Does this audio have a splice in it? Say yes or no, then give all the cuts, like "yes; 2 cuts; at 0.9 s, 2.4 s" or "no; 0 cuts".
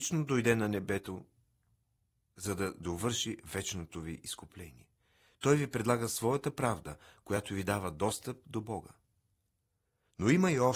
no; 0 cuts